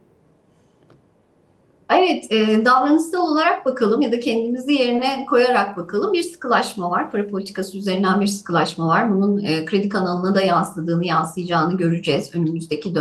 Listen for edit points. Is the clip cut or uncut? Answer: uncut